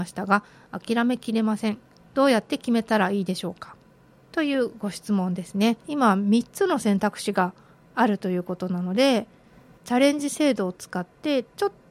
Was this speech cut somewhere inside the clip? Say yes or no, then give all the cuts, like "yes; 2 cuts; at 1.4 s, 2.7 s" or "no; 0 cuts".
yes; 1 cut; at 5.8 s